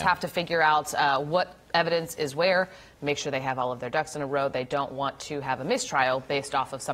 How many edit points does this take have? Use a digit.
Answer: 0